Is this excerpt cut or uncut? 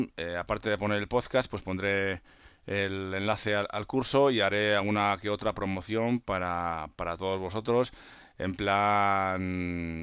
uncut